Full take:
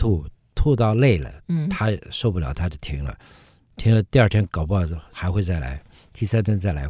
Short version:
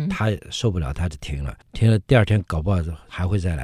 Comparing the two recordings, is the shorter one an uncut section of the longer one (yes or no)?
no